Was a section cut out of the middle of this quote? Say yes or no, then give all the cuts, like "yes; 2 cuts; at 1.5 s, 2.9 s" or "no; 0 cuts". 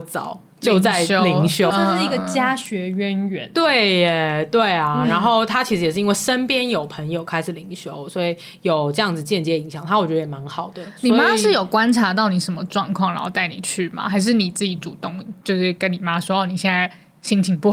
yes; 1 cut; at 1.7 s